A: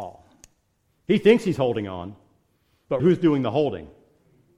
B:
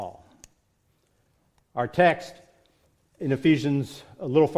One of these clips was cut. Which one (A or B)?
A